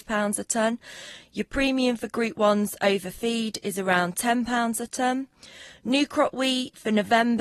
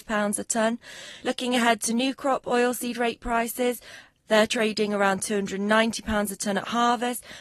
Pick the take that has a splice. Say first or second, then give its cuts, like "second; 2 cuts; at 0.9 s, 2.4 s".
second; 1 cut; at 1.2 s